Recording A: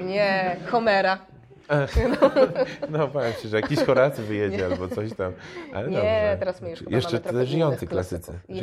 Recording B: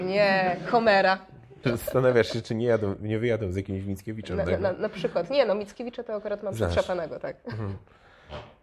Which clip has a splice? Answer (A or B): B